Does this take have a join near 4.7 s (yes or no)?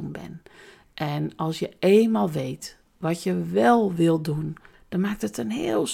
yes